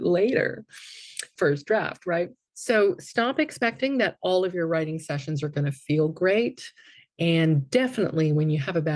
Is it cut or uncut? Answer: cut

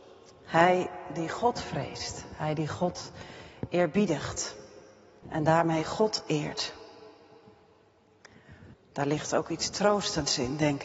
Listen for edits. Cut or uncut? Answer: cut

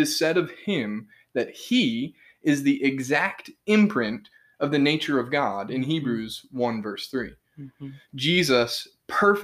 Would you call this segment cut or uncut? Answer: uncut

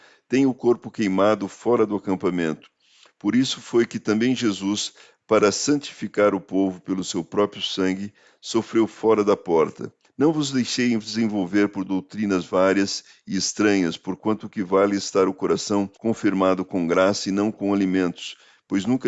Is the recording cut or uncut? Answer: cut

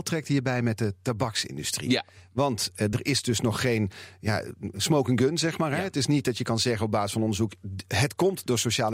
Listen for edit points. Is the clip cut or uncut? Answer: uncut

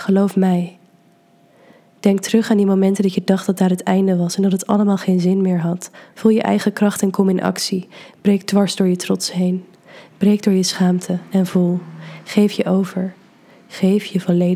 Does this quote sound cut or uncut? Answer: cut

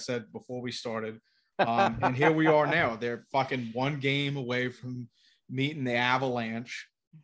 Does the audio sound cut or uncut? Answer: cut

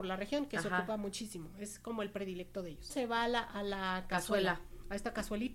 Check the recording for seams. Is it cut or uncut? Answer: cut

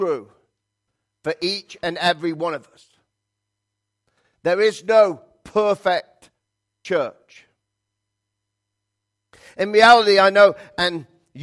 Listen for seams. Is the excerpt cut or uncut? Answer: uncut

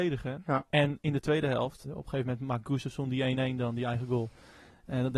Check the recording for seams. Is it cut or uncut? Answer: cut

